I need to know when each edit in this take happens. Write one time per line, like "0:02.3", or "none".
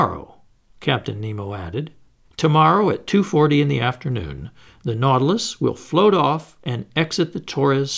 0:02.2